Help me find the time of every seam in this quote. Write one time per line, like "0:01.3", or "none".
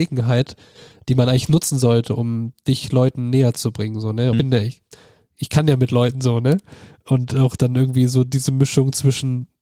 0:04.3